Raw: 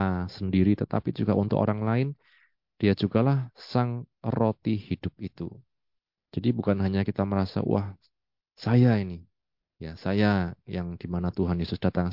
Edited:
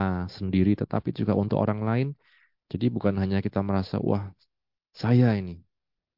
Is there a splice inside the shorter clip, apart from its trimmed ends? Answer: yes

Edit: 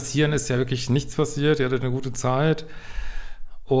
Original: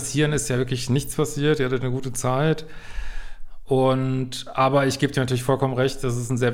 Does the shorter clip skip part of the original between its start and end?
no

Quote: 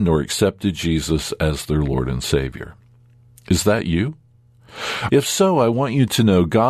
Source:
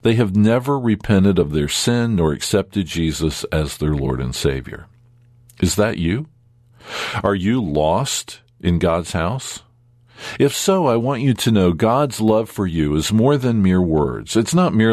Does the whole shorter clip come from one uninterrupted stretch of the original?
no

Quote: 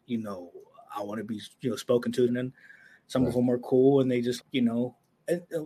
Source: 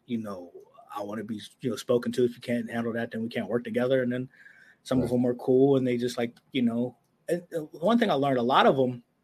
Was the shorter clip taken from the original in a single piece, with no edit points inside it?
no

